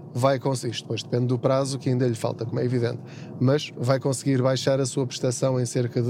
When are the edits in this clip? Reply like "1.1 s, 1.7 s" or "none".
none